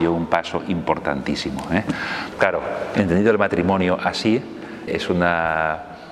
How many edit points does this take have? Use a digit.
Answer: 2